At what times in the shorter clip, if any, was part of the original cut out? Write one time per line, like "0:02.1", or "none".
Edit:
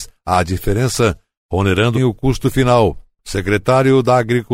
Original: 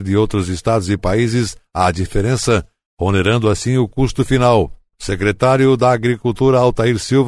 0:01.9

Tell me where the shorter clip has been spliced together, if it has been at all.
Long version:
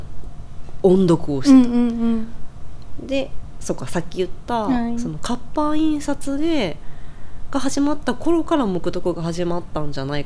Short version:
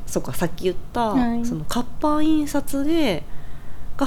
none

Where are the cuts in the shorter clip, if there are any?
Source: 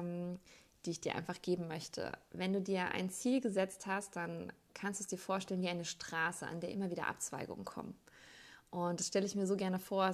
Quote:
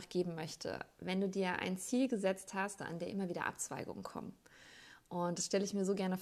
0:02.8

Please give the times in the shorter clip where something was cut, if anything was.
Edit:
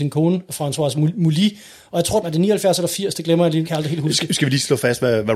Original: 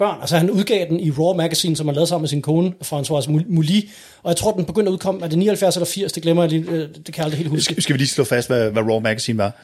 0:02.2
0:03.6

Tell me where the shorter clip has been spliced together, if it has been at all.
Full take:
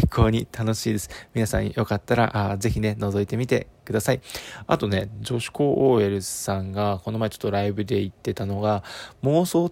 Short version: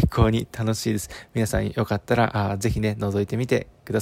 none

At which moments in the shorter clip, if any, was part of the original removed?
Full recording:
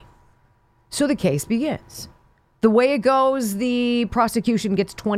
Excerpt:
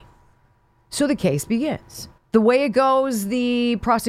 0:02.2

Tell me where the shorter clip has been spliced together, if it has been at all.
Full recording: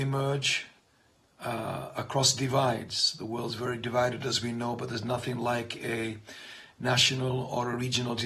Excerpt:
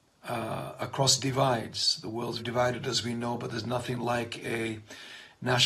0:02.4

